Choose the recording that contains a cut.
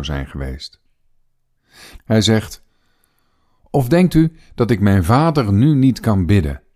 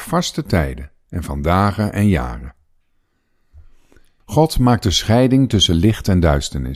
first; 1 cut; at 2.0 s

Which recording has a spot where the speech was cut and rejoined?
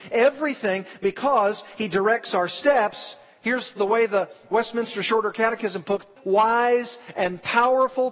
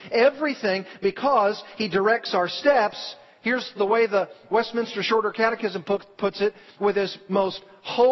first; 1 cut; at 6.2 s

